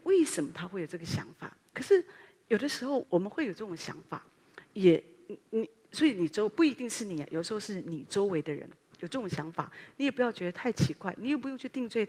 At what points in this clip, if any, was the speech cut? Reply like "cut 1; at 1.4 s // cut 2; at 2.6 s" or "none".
cut 1; at 1.7 s // cut 2; at 3.0 s

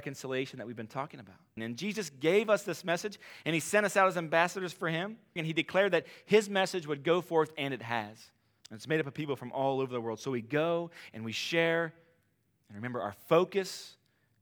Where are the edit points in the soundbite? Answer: cut 1; at 1.6 s // cut 2; at 5.4 s // cut 3; at 8.6 s

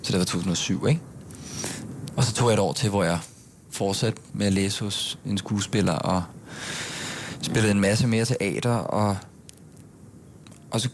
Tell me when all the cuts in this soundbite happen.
cut 1; at 2.1 s

